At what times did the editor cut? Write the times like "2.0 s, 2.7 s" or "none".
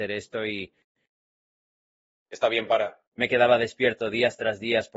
3.1 s